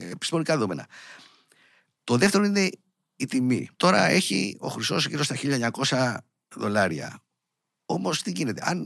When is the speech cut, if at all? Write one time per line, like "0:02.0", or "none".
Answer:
0:03.7